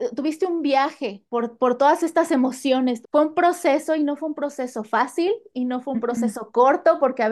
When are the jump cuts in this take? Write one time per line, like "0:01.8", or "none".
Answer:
0:01.3
0:03.0

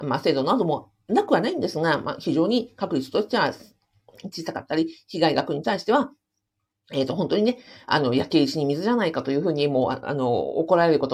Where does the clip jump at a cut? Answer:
none

